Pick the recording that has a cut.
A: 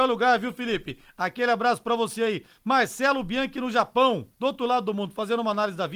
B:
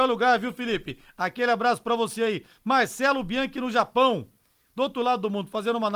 A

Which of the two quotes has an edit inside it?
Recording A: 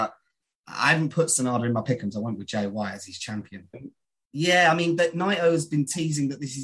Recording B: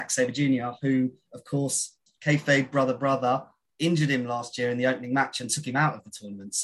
A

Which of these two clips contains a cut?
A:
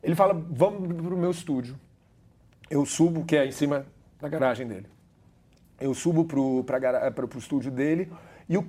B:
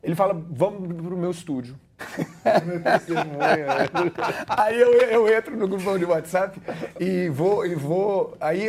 B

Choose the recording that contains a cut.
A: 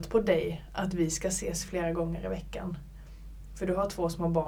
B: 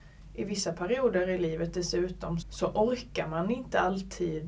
B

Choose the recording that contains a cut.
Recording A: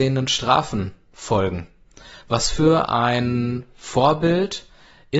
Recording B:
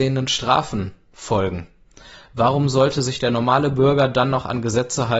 A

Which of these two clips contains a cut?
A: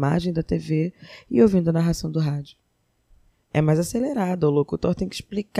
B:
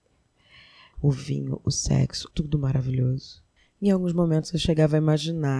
B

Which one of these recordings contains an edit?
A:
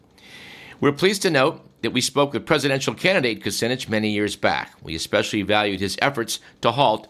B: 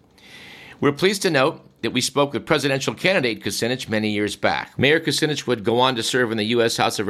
B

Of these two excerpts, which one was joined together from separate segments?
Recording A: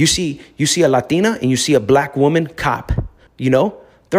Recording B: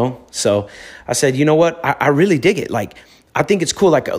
A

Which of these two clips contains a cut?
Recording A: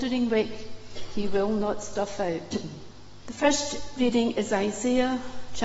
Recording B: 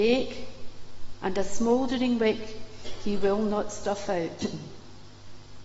A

